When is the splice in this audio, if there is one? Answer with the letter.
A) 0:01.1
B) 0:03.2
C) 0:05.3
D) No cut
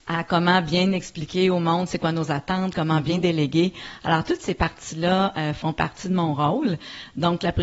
D